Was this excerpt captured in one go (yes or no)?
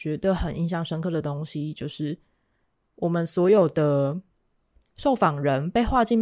yes